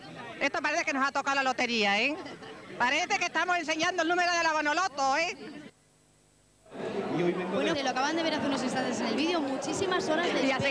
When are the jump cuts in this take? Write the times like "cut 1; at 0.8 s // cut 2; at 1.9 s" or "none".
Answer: cut 1; at 7.7 s